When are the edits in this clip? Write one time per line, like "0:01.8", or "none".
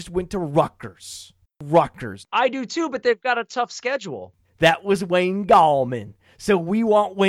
0:02.2
0:04.4